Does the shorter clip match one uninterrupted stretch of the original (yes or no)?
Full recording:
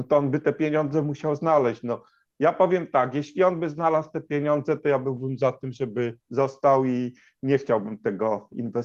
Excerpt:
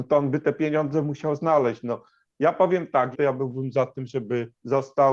no